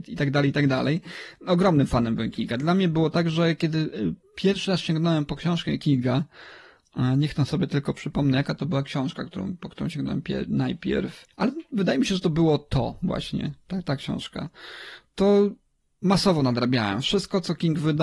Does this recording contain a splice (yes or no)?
yes